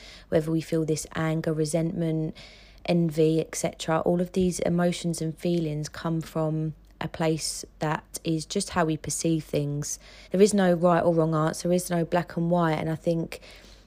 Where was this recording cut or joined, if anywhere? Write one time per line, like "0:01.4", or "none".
0:10.2